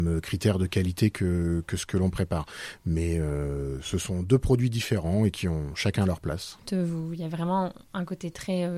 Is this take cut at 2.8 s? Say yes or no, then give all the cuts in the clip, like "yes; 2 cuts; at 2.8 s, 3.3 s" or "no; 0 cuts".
no; 1 cut; at 6.6 s